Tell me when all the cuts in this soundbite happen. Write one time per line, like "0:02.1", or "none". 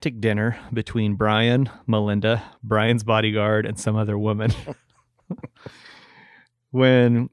none